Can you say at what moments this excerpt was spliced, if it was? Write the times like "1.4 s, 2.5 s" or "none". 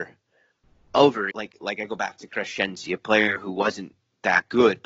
1.3 s